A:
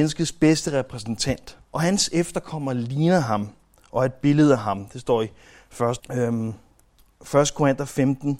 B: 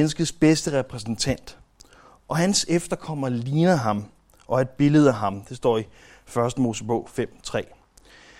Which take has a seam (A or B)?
A